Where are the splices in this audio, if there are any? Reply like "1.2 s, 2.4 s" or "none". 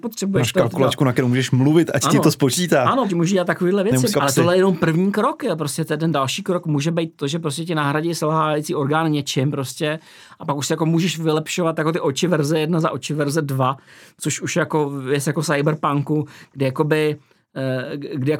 3.1 s, 4.1 s